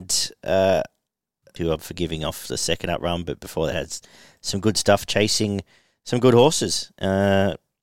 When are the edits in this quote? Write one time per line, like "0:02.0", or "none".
0:01.6

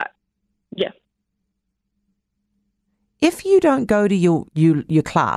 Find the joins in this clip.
0:04.5

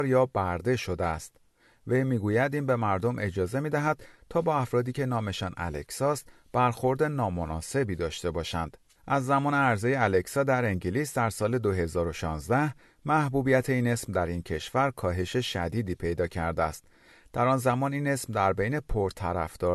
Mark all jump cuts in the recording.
none

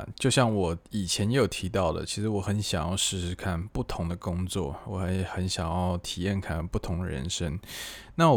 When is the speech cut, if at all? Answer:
none

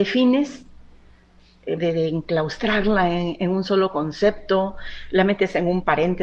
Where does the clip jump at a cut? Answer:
0:01.8

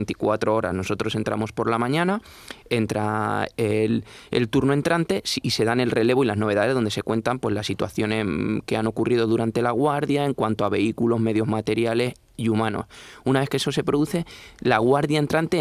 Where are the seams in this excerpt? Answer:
none

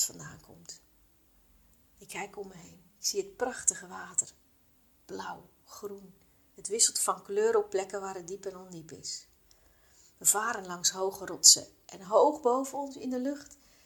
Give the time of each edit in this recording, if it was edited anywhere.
0:02.9

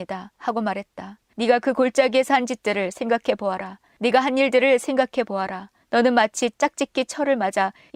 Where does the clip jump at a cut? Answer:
0:01.3

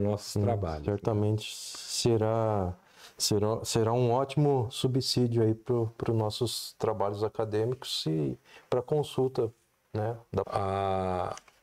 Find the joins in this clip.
0:10.4

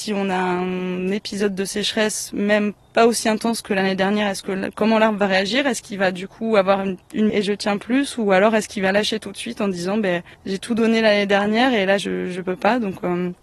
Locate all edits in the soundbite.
0:07.3
0:10.3

